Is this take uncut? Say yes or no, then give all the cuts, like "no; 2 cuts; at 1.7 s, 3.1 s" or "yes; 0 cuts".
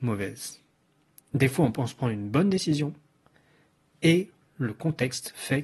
no; 1 cut; at 1.2 s